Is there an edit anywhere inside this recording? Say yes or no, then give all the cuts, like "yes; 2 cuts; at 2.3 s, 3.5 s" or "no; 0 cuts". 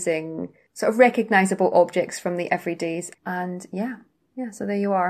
yes; 1 cut; at 3.2 s